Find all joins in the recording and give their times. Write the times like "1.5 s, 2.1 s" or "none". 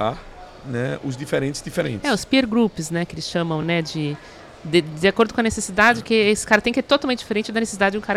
none